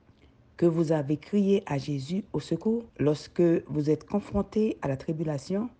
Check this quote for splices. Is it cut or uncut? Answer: cut